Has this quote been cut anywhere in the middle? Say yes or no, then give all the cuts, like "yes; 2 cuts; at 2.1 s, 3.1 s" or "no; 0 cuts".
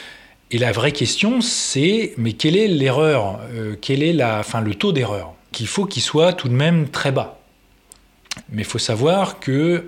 yes; 2 cuts; at 5.5 s, 8.4 s